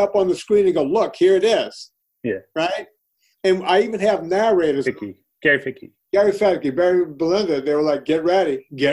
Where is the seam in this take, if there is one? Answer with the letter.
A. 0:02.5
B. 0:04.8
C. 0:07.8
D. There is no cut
B